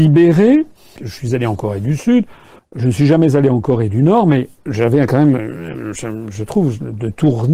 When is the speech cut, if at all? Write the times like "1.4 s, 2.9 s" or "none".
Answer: 1.0 s, 2.6 s, 4.6 s